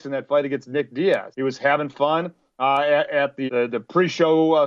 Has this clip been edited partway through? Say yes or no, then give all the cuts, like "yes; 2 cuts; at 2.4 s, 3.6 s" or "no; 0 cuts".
yes; 2 cuts; at 1.3 s, 3.5 s